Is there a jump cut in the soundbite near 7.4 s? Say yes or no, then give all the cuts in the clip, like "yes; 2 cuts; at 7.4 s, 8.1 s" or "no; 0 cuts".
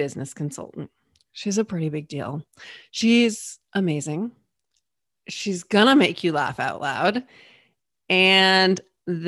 no; 0 cuts